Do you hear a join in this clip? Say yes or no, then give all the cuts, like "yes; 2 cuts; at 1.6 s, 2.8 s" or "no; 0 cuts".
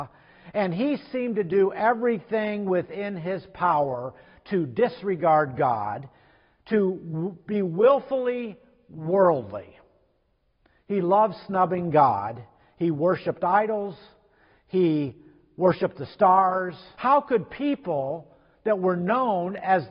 yes; 1 cut; at 16.9 s